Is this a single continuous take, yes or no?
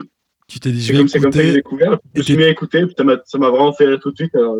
yes